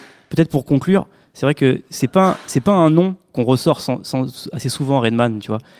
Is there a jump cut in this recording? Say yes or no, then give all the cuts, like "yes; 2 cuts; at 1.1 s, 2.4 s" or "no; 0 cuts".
no; 0 cuts